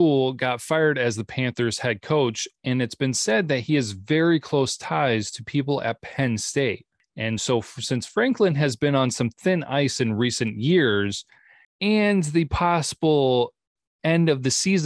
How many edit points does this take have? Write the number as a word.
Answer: zero